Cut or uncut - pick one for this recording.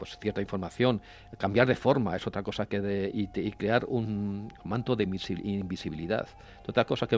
uncut